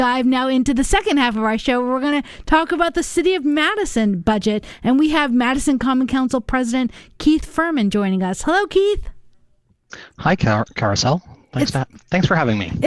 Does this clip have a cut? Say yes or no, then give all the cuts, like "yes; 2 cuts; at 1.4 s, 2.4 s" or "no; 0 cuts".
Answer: no; 0 cuts